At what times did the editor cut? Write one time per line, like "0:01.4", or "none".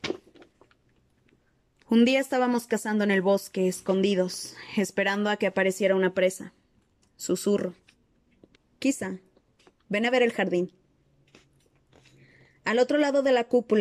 0:08.6

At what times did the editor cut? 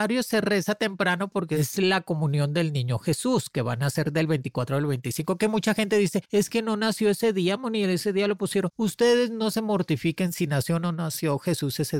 none

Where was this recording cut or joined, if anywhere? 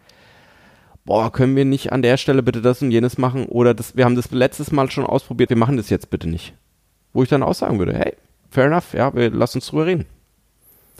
0:05.5

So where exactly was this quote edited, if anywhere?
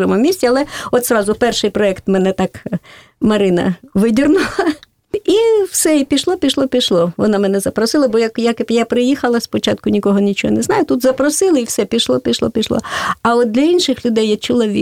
none

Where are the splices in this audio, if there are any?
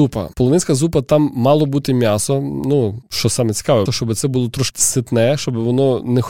0:03.9

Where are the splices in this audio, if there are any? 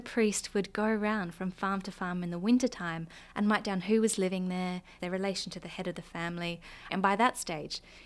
0:05.0
0:06.9

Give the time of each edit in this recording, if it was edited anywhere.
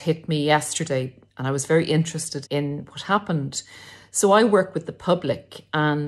0:02.5

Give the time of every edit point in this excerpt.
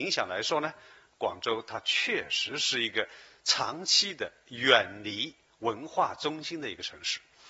none

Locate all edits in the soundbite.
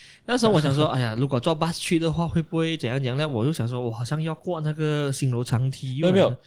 none

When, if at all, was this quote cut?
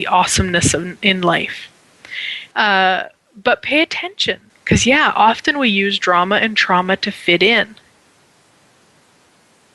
0:02.5
0:04.5

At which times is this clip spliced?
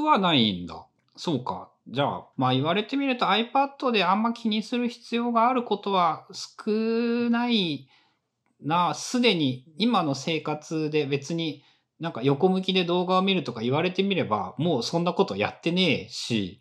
0:01.0
0:02.3

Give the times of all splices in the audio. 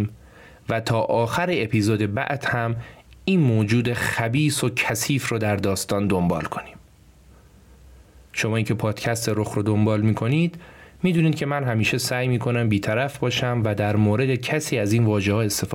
none

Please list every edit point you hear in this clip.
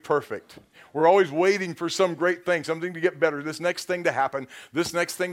none

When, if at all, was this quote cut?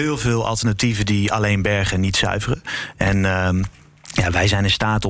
none

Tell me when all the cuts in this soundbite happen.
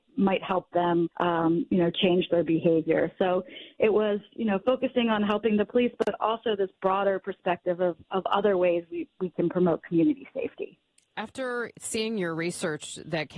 0:01.1

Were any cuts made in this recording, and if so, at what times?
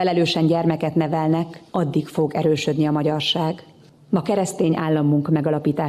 0:01.7

